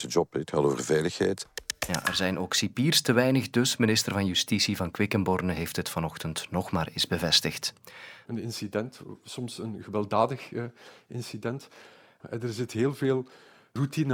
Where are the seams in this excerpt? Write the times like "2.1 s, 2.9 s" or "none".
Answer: 8.3 s, 12.2 s